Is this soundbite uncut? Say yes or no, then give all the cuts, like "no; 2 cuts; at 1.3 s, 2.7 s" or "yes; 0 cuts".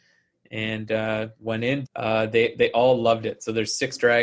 no; 1 cut; at 1.8 s